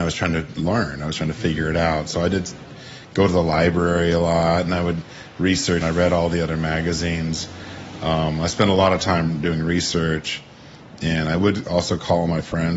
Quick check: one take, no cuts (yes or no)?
no